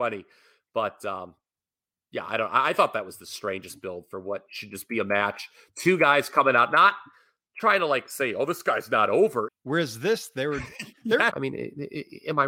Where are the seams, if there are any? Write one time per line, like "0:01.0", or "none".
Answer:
0:09.5
0:11.3